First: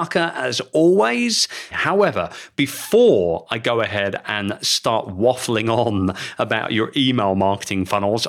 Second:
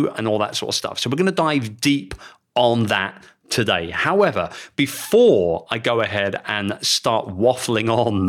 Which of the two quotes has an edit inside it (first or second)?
first